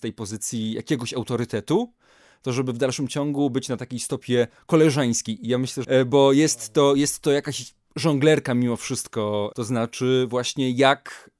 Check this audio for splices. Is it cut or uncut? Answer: cut